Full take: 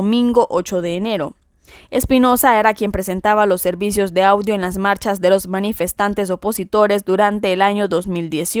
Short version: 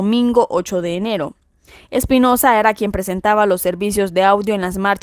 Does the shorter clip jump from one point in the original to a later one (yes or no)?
no